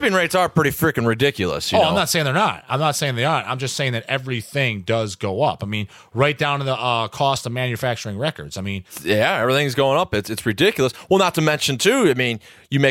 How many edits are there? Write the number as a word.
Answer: zero